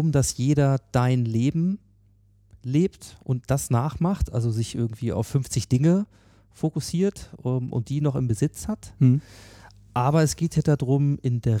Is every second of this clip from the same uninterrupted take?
yes; 0 cuts

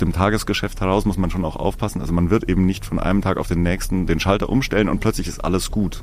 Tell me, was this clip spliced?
no; 0 cuts

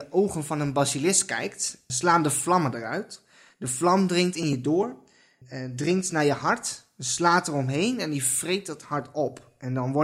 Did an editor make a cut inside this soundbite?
no; 0 cuts

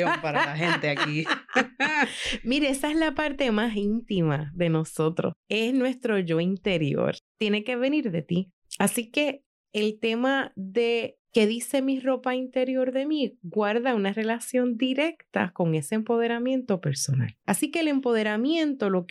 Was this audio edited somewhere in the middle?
yes; 2 cuts; at 7.3 s, 17.4 s

